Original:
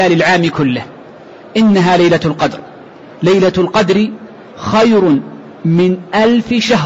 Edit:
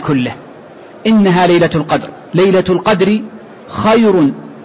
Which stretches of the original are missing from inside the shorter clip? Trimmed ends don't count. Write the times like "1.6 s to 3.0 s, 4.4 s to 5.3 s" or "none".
2.8 s to 3.2 s